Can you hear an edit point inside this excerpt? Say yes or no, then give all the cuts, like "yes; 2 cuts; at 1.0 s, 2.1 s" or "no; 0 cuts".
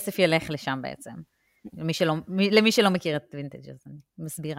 yes; 1 cut; at 1.7 s